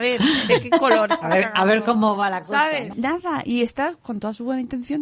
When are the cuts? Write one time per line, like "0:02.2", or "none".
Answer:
0:02.9
0:04.0